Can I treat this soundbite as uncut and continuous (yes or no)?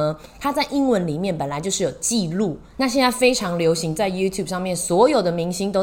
no